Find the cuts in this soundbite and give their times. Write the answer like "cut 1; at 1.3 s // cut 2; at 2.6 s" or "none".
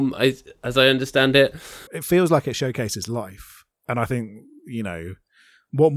cut 1; at 1.9 s